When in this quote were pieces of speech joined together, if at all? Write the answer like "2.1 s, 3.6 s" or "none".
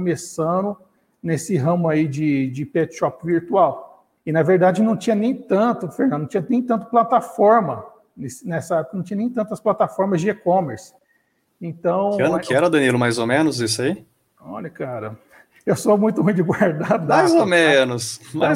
4.2 s